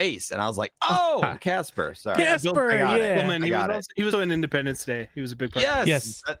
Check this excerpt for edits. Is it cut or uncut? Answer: cut